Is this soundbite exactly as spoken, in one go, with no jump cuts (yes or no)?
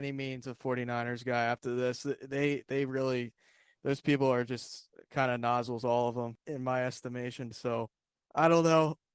no